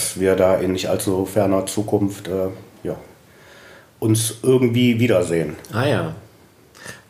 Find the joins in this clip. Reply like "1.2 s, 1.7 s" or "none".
none